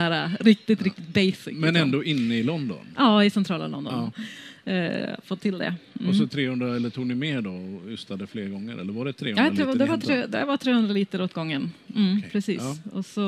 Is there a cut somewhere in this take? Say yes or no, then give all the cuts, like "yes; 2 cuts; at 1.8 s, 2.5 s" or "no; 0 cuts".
yes; 1 cut; at 4.1 s